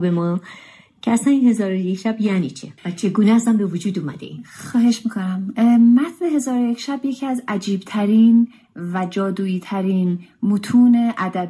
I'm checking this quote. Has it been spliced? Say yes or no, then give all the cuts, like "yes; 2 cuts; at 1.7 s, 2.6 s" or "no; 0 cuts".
yes; 1 cut; at 2.8 s